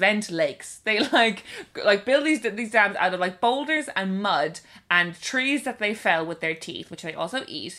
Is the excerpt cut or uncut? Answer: uncut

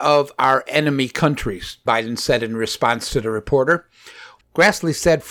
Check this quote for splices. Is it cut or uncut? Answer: cut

